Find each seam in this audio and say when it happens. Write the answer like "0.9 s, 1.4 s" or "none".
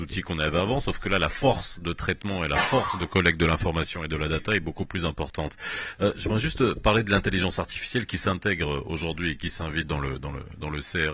none